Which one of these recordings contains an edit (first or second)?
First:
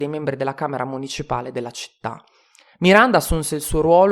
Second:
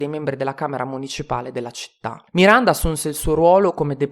second